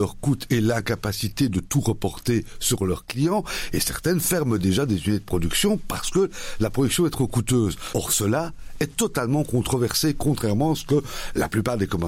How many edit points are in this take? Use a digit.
1